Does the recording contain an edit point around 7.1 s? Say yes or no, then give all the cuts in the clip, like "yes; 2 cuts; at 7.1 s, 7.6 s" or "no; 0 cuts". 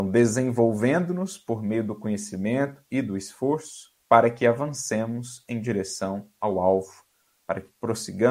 no; 1 cut; at 4.0 s